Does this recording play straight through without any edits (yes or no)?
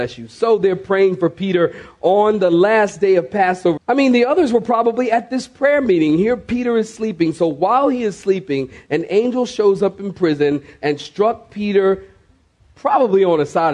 no